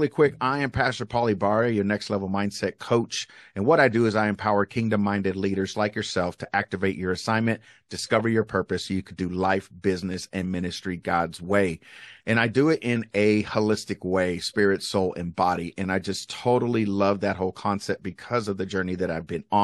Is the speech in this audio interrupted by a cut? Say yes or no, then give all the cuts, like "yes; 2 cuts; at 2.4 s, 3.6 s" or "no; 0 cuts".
yes; 1 cut; at 5.7 s